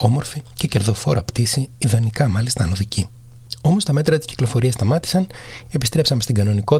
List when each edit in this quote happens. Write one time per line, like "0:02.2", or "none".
none